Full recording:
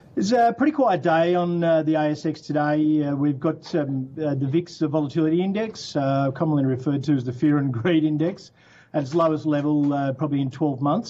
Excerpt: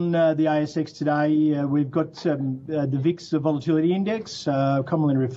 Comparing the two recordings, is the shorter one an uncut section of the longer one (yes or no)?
yes